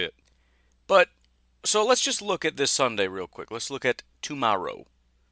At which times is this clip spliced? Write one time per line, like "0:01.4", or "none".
0:01.6